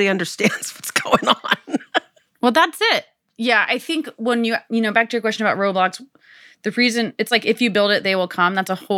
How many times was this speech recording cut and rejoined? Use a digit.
0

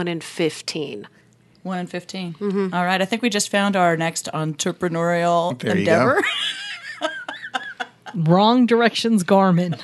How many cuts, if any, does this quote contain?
0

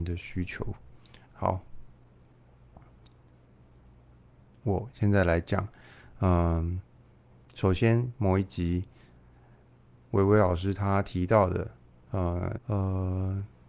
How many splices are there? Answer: 1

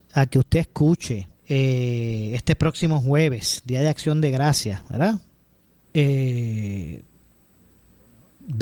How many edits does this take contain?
2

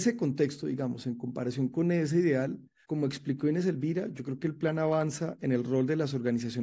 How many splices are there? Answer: 0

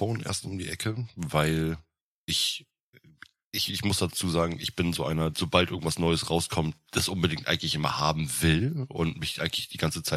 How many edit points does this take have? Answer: 1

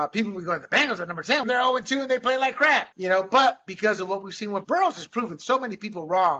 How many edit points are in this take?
3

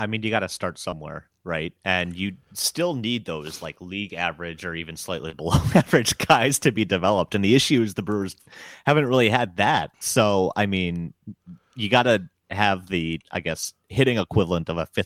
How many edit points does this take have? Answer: 0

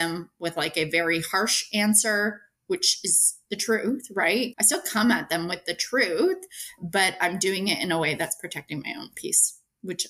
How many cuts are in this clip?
1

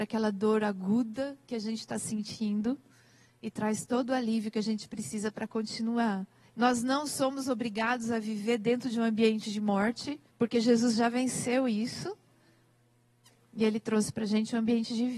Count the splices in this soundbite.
2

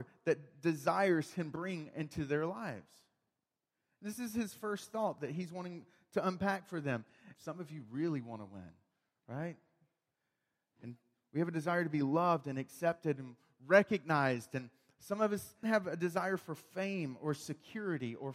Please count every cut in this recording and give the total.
2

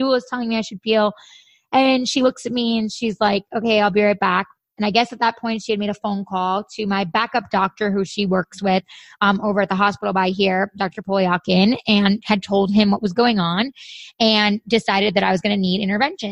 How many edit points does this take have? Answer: 0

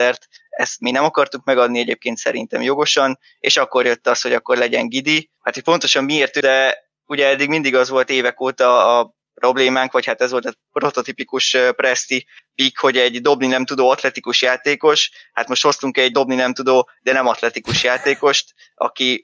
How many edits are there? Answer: 1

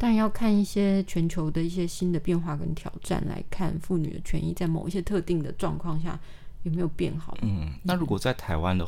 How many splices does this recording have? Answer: 1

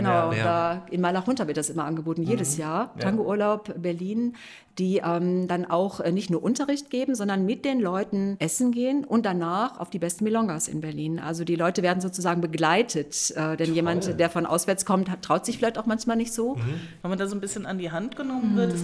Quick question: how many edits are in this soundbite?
1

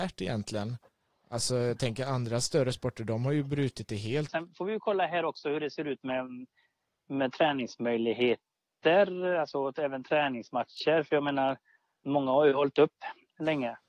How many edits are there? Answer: 1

